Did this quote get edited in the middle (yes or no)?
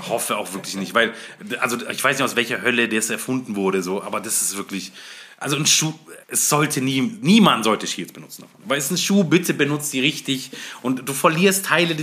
yes